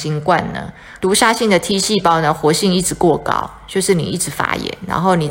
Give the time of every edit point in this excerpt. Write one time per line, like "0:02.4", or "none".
0:01.0